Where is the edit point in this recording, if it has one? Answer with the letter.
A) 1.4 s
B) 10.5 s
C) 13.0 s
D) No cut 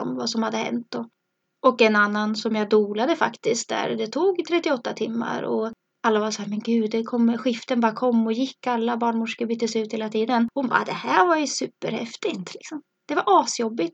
D